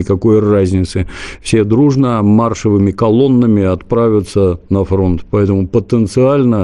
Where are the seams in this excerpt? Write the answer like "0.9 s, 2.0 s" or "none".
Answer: none